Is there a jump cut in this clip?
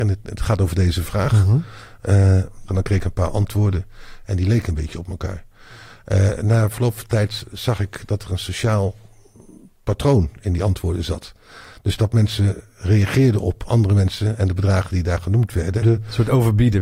yes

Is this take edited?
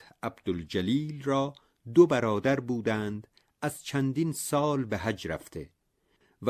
no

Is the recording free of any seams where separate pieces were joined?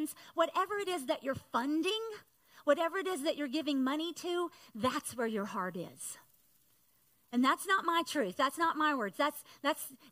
yes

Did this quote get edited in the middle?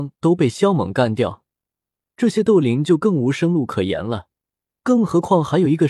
yes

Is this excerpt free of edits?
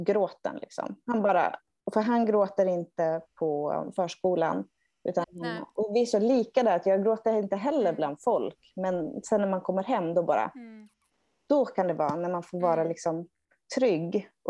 no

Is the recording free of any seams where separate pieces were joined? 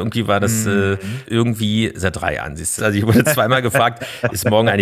no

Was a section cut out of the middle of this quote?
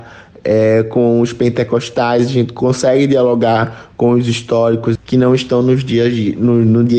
yes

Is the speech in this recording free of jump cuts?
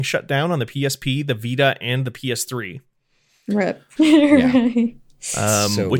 no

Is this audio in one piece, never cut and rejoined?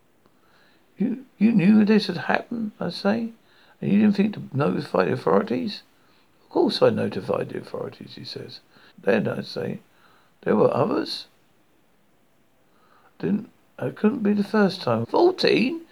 no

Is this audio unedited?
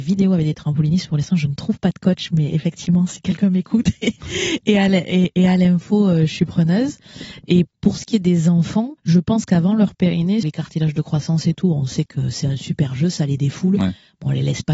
no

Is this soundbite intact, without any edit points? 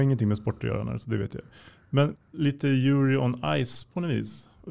no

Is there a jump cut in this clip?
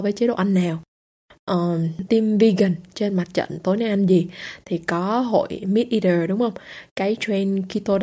yes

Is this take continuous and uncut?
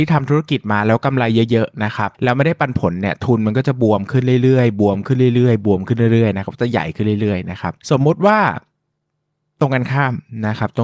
no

